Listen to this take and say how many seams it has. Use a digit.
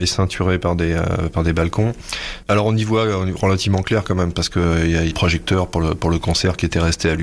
2